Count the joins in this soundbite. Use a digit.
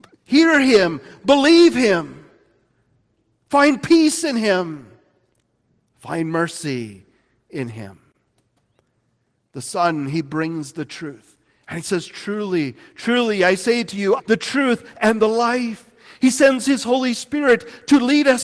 1